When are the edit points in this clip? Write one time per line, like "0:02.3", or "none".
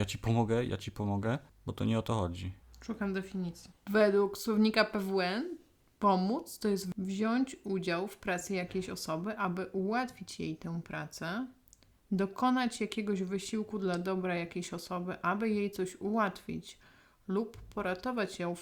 none